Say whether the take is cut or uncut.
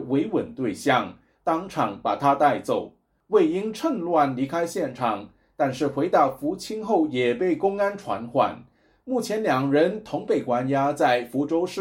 uncut